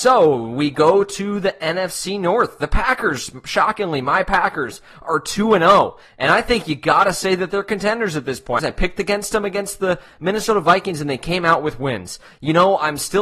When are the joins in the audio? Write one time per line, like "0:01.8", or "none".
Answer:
0:08.6